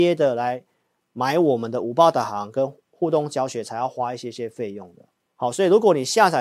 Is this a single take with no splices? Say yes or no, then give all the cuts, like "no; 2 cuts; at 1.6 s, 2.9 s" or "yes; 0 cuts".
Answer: no; 1 cut; at 5.3 s